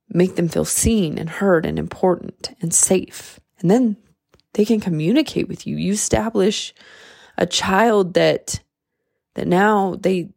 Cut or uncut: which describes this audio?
cut